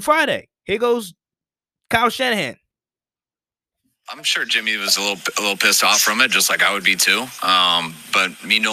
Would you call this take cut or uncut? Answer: uncut